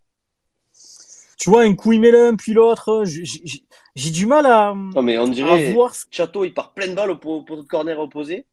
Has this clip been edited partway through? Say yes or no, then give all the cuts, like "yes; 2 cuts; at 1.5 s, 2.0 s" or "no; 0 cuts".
yes; 2 cuts; at 1.3 s, 6.0 s